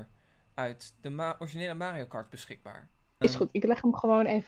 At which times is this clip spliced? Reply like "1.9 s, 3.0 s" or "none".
3.2 s